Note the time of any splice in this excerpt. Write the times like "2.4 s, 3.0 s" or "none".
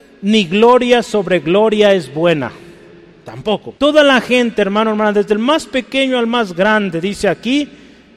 3.8 s